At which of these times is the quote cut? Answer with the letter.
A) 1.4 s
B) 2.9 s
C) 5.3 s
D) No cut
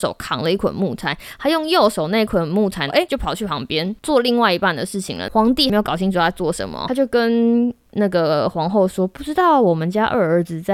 B